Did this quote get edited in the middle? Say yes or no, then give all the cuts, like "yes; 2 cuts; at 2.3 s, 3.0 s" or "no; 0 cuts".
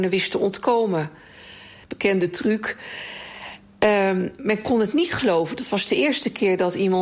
yes; 1 cut; at 1.8 s